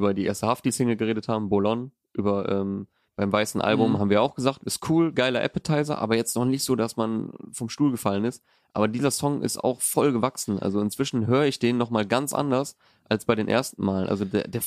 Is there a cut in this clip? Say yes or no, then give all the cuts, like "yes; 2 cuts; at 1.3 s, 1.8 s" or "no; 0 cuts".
no; 0 cuts